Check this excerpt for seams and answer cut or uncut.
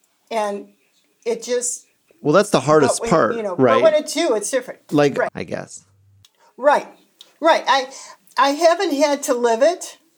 cut